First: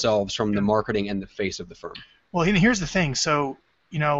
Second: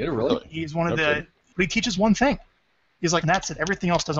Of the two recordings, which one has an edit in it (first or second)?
second